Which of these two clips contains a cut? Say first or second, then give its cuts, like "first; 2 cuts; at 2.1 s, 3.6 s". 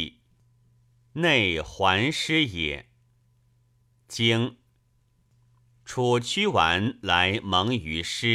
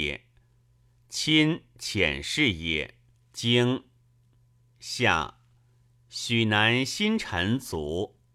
second; 1 cut; at 3.1 s